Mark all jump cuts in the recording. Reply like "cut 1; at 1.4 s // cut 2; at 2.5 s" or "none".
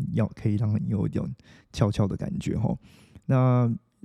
none